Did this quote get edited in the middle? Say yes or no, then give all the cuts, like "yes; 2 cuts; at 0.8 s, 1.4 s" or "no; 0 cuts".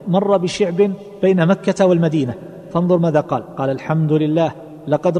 no; 0 cuts